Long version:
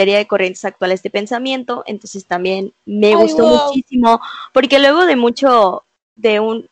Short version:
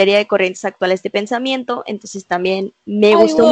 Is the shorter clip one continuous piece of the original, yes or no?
yes